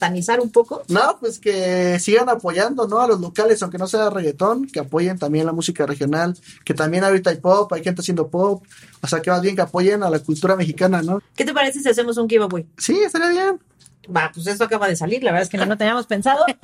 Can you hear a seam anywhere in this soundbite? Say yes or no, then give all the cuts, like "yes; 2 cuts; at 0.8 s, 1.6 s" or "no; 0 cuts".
yes; 1 cut; at 11.2 s